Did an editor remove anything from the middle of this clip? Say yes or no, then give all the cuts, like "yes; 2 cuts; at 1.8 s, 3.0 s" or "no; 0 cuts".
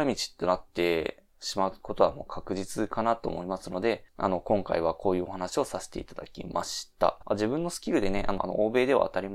yes; 2 cuts; at 7.2 s, 8.4 s